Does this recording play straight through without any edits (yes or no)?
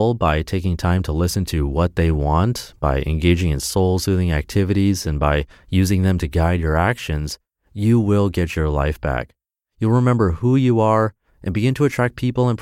yes